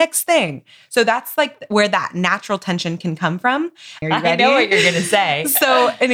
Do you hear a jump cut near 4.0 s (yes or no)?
yes